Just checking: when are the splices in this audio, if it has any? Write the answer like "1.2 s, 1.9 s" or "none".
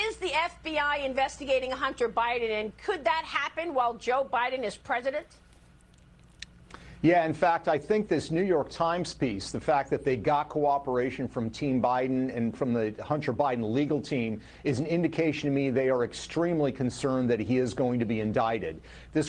12.5 s